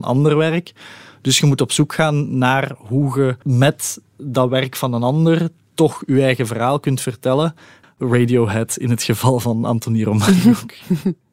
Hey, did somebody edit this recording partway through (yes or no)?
yes